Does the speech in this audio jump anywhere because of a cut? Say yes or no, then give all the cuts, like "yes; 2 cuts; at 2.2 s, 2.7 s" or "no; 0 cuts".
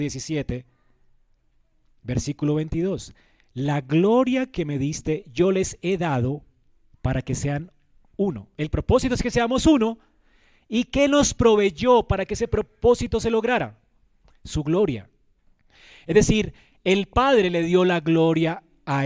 no; 0 cuts